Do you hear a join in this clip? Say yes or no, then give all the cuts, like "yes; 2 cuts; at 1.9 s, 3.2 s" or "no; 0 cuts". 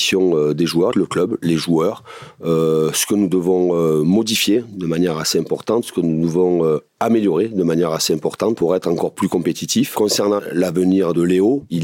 yes; 1 cut; at 0.9 s